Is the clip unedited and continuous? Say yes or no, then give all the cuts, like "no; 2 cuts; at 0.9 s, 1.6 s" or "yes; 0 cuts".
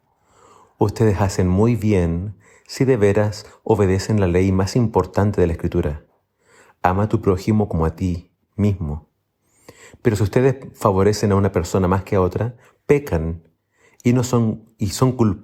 yes; 0 cuts